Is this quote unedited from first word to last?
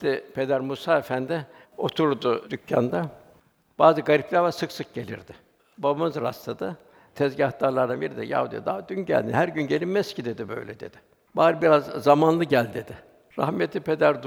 no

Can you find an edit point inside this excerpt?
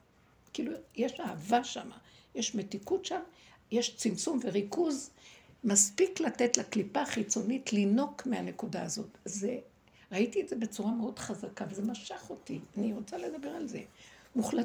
no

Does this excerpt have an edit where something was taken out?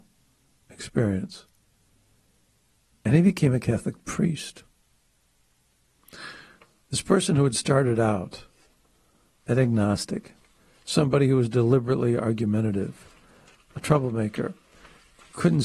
no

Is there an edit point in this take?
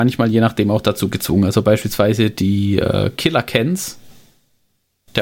no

